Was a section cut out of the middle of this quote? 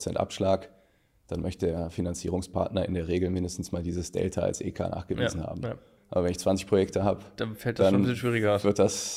yes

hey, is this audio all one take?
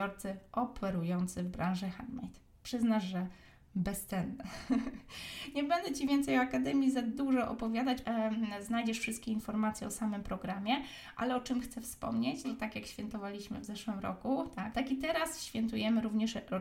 no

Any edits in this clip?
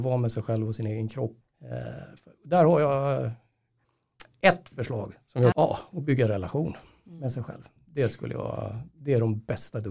yes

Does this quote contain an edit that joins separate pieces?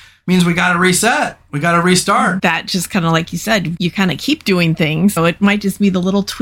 yes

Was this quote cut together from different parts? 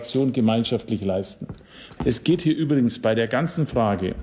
yes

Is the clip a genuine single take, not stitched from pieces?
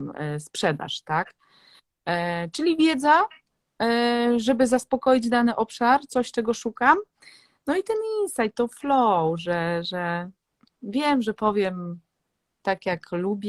yes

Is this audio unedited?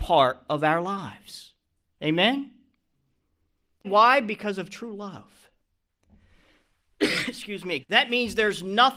no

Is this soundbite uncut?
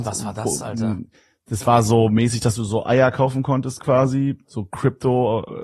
yes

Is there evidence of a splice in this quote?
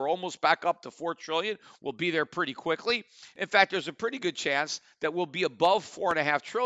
no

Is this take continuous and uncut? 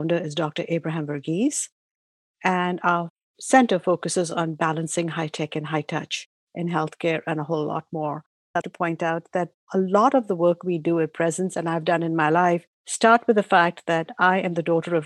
no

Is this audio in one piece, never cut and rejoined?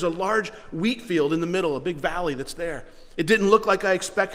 yes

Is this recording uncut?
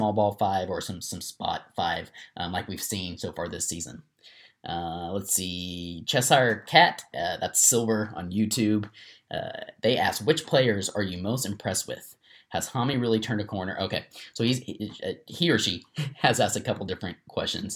yes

